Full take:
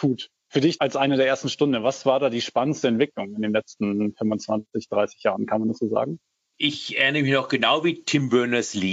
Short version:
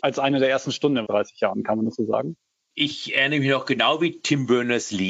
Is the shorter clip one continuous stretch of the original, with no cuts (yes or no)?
no